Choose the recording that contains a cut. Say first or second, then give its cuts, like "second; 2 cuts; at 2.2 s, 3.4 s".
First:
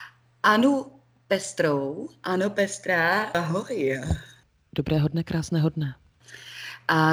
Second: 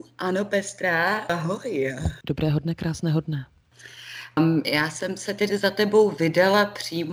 second; 2 cuts; at 2.2 s, 4.4 s